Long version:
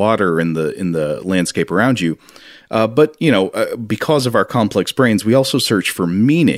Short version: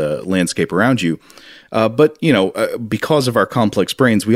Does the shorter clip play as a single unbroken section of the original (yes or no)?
yes